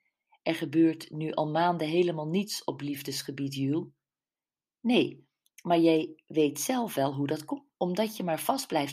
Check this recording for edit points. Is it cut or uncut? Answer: cut